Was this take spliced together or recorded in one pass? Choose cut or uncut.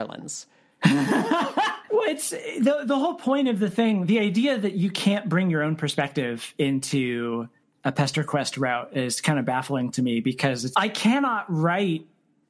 cut